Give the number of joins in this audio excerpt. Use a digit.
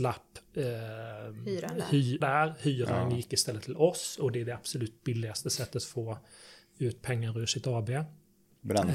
1